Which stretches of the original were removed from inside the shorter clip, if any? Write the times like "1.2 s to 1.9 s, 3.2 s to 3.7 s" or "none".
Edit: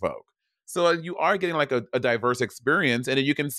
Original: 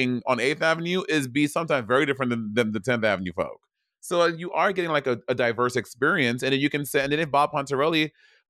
none